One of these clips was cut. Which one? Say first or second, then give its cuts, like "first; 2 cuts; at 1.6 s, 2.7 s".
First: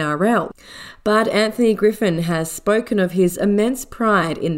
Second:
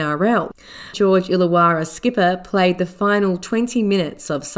second; 1 cut; at 0.9 s